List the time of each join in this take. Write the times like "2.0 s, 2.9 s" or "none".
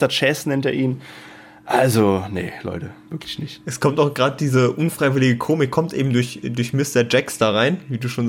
none